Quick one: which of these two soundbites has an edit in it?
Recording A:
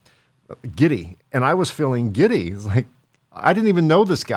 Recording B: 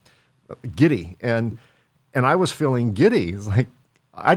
A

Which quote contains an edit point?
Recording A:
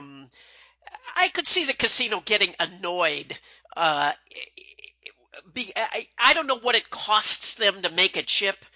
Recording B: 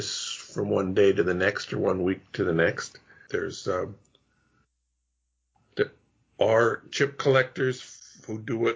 B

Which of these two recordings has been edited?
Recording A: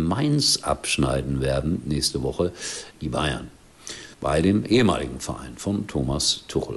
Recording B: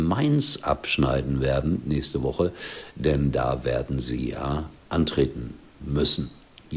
A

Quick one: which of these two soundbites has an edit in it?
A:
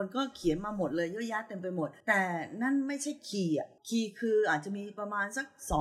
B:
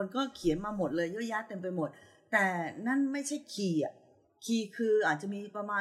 A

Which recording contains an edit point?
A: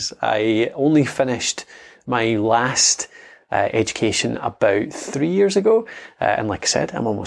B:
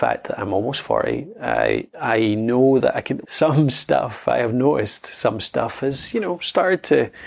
B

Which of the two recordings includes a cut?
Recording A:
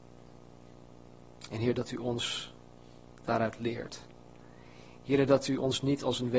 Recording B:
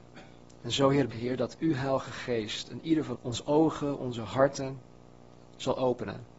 B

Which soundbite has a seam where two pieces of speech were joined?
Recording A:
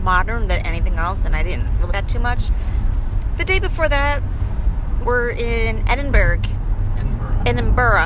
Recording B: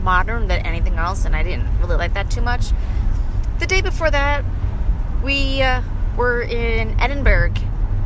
A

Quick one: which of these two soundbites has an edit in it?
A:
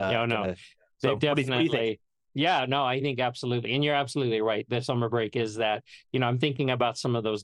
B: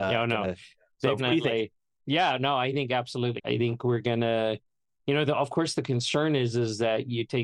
B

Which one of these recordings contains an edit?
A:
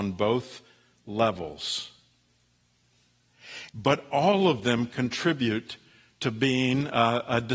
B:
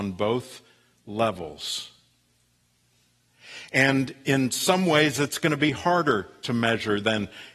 A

